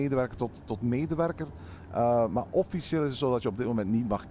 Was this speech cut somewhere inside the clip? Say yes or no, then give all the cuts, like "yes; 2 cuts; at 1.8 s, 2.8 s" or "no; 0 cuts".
no; 0 cuts